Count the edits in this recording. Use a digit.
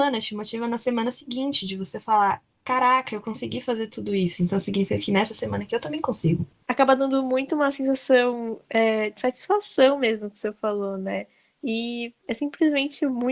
1